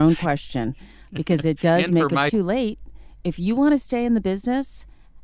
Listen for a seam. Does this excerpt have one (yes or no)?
yes